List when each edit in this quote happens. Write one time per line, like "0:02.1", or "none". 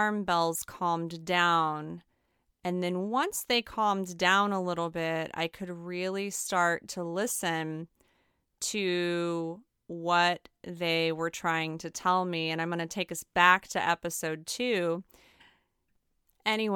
0:15.4

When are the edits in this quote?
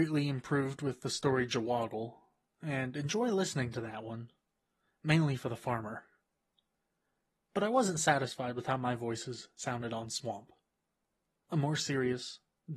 none

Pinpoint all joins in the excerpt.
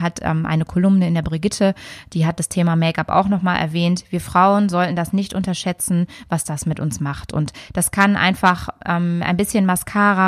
none

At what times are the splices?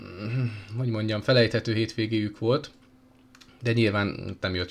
none

